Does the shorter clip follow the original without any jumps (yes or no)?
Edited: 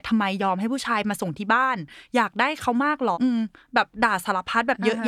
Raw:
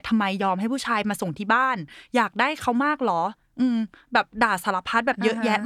no